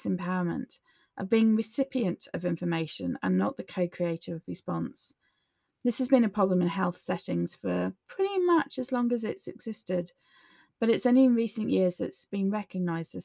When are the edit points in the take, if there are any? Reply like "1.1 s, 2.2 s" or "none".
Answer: none